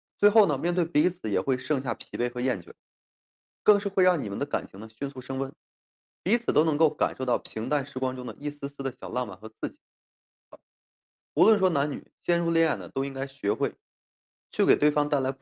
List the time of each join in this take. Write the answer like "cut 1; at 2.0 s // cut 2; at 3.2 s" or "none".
cut 1; at 3.5 s // cut 2; at 10.5 s